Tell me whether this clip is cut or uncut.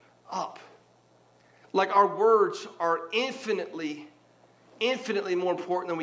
uncut